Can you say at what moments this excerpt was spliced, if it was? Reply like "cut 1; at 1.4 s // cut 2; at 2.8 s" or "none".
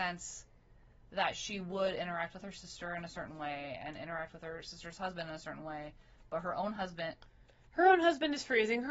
none